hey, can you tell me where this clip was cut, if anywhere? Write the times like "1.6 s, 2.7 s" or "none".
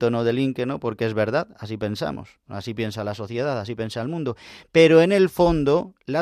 none